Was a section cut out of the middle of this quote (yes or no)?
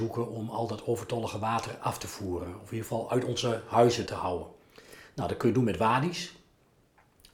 yes